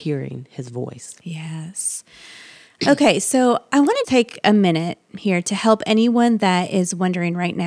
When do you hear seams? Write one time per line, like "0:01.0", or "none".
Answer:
0:04.0